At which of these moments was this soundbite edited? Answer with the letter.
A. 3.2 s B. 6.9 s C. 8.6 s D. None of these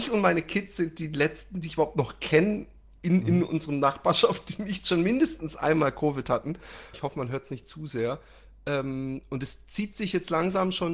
B